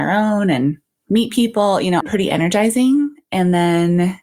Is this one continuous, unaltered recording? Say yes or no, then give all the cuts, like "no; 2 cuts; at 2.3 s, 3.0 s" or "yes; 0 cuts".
no; 1 cut; at 2.0 s